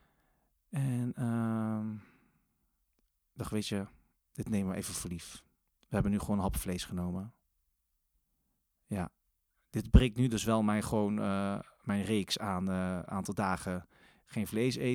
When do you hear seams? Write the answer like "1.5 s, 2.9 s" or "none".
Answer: none